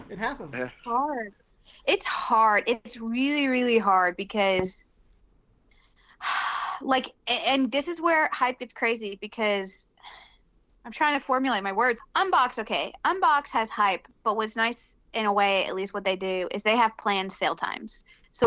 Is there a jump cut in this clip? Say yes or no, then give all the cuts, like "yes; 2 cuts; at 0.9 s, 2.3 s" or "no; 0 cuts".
no; 0 cuts